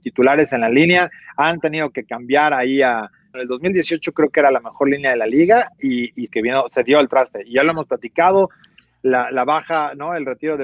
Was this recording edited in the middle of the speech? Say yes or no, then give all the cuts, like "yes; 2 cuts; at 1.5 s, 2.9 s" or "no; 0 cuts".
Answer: yes; 2 cuts; at 3.3 s, 6.3 s